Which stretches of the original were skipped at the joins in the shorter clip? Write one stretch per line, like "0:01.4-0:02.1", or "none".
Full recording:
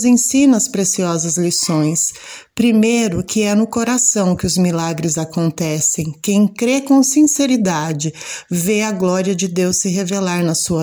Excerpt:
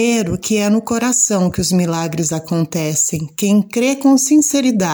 none